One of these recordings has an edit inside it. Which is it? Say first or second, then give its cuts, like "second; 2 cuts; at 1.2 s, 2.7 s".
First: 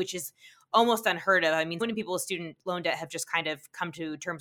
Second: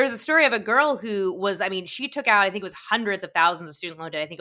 first; 1 cut; at 1.8 s